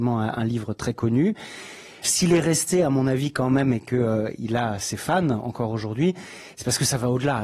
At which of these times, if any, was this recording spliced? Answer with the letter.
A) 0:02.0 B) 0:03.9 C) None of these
A